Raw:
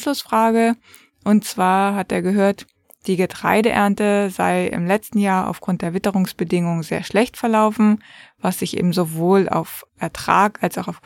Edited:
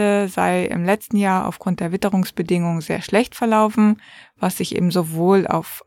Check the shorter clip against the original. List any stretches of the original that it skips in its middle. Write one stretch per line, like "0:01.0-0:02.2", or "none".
none

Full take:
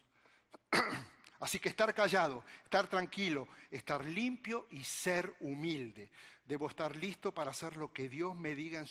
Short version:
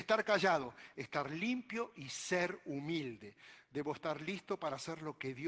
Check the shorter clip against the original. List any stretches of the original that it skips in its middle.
0:02.6-0:03.7

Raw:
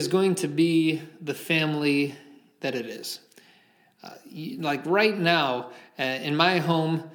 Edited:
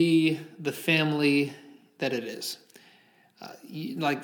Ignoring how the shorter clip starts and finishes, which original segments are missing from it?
none

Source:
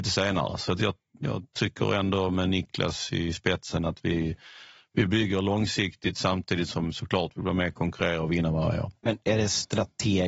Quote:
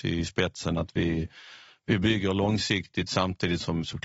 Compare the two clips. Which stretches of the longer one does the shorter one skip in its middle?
none

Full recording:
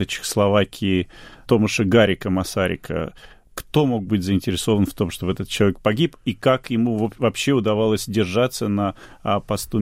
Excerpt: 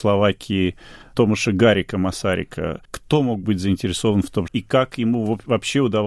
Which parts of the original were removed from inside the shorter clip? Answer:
0:03.2-0:03.5
0:05.1-0:06.2

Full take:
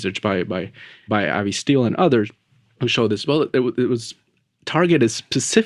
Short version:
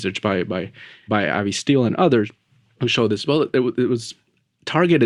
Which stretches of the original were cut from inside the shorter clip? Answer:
none

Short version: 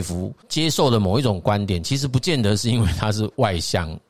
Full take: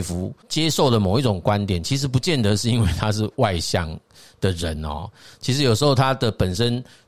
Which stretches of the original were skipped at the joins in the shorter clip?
none

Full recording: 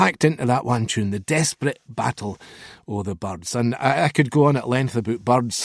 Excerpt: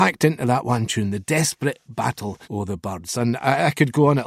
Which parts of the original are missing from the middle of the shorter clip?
0:02.4-0:02.8

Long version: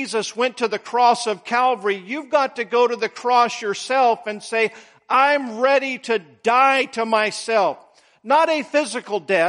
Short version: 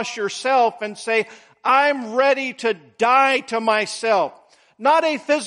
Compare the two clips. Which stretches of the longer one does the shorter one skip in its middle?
none

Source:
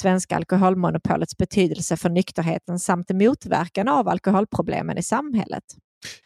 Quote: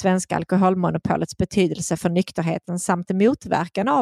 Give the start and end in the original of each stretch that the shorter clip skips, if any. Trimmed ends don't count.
none

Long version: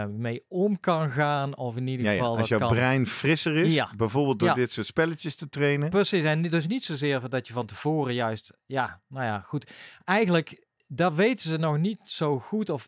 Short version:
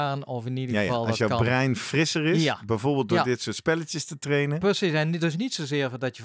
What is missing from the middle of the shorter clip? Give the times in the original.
none

